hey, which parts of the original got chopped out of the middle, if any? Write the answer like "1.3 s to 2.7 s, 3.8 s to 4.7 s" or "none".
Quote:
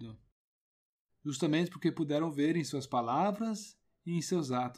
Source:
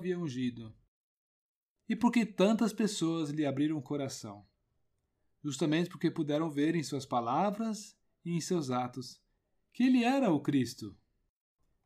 1.6 s to 5.3 s